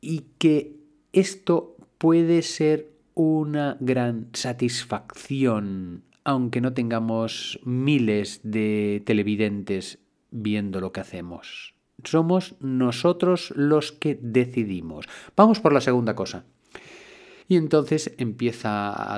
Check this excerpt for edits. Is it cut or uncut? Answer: cut